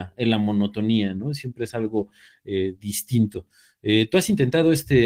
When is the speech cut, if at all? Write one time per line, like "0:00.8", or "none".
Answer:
none

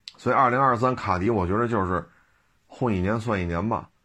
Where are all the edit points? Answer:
none

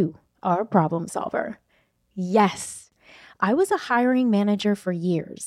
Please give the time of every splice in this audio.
none

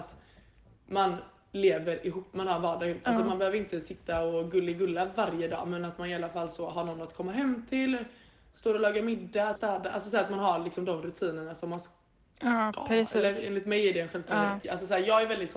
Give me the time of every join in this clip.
0:09.6
0:14.6

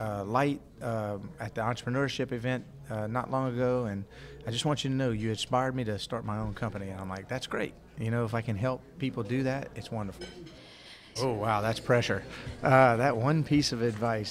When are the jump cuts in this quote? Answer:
0:11.2

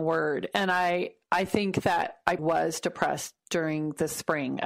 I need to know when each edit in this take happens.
0:02.4

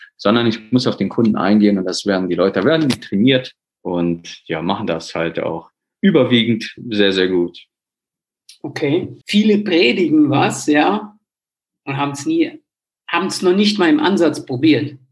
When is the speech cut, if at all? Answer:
0:09.2

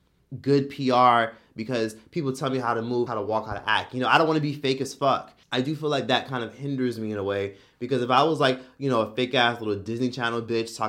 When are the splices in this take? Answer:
0:03.1
0:05.4

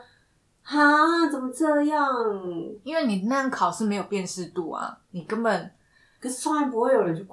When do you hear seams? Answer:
none

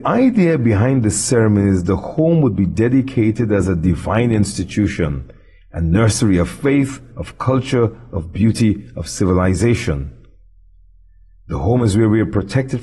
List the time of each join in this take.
0:07.1

